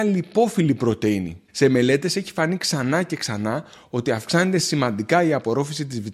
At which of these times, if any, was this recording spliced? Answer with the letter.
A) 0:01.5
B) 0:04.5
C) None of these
A